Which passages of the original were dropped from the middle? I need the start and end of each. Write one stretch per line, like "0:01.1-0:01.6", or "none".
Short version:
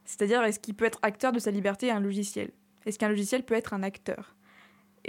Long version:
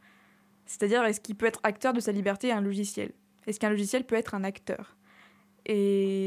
none